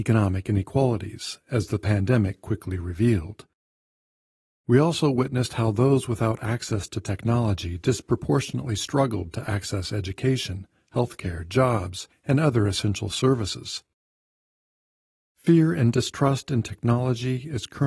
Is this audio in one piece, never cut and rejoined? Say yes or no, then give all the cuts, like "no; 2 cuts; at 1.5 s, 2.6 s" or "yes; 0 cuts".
yes; 0 cuts